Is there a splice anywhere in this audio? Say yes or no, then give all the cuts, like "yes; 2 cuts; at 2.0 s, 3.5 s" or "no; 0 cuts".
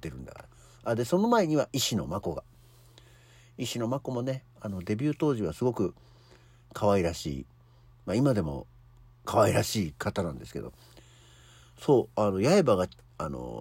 no; 0 cuts